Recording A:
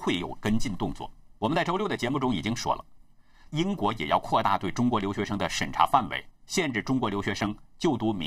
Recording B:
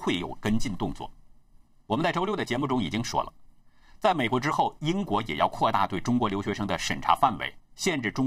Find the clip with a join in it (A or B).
A